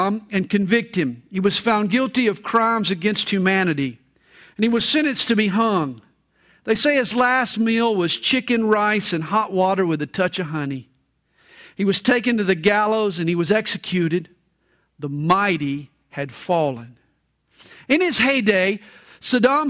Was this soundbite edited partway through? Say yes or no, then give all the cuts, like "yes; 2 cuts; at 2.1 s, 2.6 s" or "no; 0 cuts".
no; 0 cuts